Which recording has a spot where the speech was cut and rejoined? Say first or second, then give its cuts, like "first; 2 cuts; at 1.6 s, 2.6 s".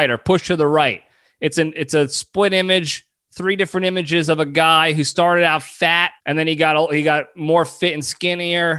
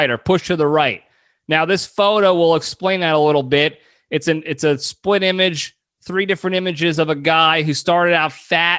first; 2 cuts; at 1.2 s, 6.2 s